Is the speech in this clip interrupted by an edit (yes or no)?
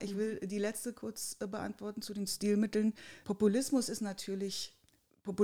yes